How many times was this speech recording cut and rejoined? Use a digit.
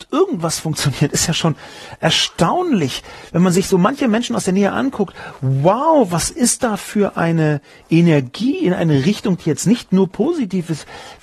0